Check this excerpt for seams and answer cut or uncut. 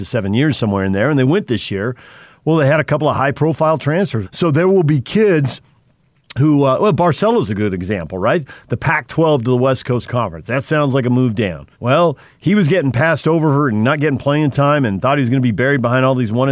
cut